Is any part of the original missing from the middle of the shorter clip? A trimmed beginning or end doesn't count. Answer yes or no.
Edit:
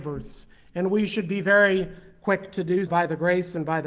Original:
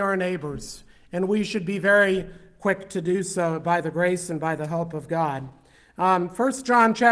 yes